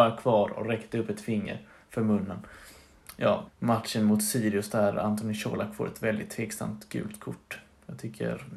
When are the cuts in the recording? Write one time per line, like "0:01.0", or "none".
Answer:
0:03.5